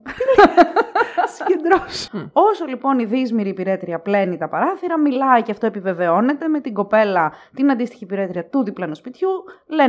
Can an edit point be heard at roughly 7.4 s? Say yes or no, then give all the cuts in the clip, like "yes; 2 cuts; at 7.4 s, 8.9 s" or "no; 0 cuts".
no; 1 cut; at 2.1 s